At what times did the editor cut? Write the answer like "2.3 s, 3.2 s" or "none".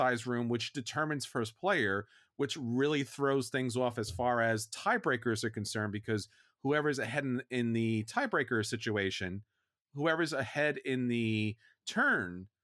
none